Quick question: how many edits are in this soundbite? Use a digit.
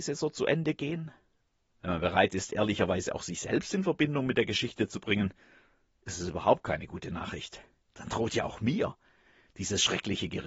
1